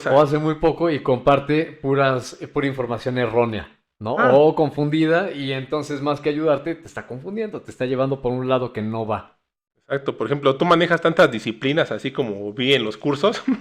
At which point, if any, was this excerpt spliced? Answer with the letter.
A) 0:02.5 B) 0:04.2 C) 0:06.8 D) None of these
D